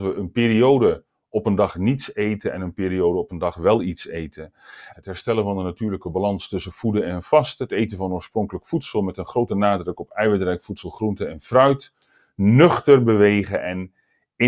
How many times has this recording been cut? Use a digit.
1